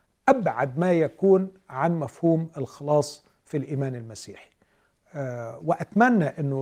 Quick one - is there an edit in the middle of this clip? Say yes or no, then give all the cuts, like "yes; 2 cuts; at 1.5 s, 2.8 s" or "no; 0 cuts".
no; 0 cuts